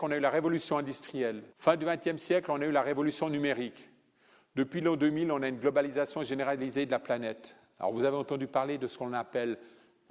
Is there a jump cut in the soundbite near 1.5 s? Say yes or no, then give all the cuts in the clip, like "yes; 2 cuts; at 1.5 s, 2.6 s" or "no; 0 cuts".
yes; 1 cut; at 1.5 s